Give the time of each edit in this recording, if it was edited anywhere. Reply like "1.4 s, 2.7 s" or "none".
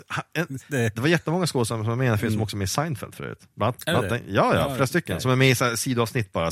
none